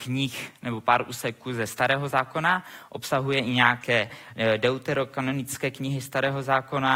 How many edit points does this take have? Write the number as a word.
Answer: zero